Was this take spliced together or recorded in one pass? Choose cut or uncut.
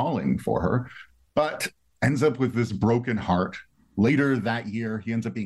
uncut